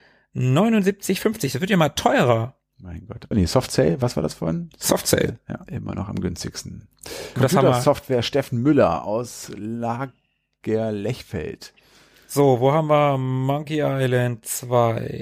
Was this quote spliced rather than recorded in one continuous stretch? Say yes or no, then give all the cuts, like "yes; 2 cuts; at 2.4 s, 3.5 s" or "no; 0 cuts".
yes; 2 cuts; at 3.3 s, 7.4 s